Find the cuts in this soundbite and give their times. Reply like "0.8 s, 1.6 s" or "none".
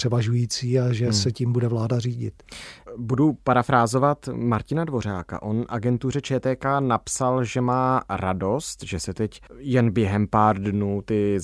9.5 s